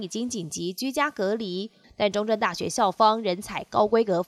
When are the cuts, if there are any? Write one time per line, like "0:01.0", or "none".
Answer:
0:01.8